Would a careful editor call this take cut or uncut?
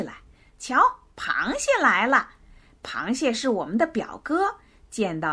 uncut